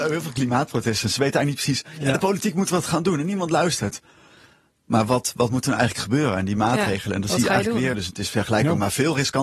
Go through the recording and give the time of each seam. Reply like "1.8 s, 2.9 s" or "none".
7.9 s